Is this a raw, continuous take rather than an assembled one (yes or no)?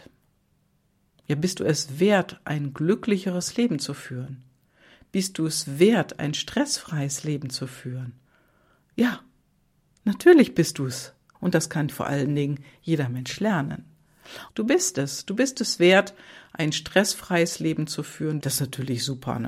no